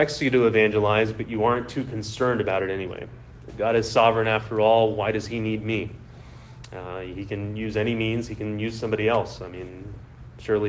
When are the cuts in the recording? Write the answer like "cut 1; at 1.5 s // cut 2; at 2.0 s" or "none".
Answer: none